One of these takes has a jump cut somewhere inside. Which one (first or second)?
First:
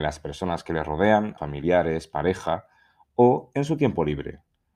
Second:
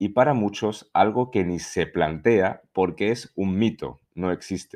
first